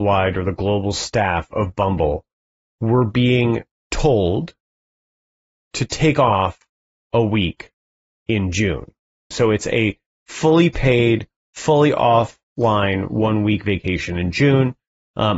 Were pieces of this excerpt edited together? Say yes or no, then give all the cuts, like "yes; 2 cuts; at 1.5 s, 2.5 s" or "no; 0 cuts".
yes; 1 cut; at 9.3 s